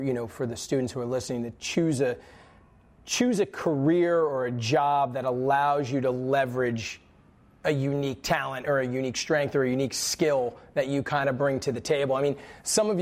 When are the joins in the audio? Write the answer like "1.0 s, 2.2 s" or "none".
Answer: none